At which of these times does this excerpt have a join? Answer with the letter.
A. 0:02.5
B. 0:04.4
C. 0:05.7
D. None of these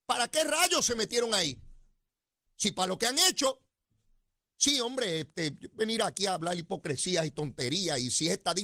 A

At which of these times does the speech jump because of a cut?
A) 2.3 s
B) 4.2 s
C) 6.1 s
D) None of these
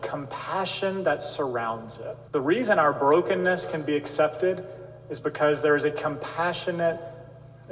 A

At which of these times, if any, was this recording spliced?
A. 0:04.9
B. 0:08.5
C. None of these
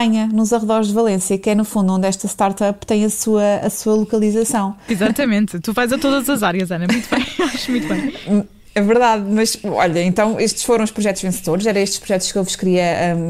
A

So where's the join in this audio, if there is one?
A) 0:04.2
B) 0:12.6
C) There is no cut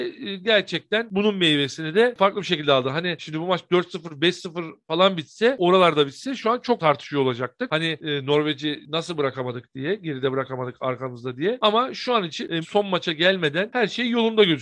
B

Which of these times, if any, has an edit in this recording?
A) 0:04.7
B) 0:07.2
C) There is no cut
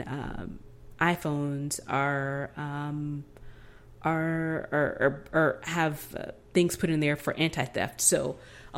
B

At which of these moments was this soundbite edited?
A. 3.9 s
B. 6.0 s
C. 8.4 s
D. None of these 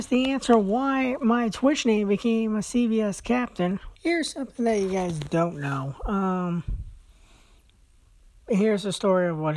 A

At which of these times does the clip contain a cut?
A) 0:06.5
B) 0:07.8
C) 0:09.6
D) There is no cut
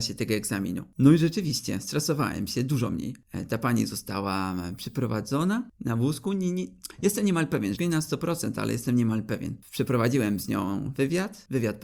B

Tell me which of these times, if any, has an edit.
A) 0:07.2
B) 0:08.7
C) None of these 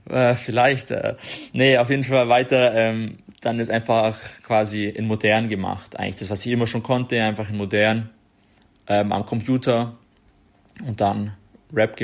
C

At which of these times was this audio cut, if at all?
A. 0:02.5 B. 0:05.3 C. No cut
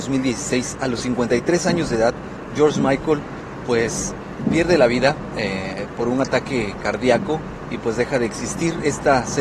C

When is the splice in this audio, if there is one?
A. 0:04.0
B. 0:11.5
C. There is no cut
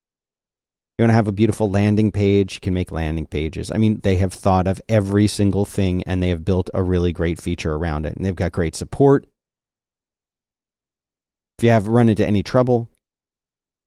A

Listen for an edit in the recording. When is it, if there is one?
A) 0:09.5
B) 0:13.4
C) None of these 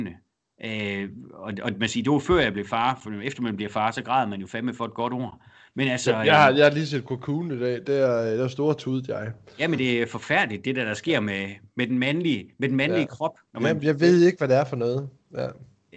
C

